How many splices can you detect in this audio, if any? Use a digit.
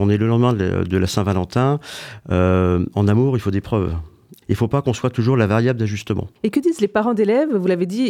2